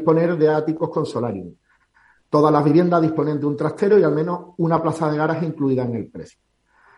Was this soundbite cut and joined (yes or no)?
no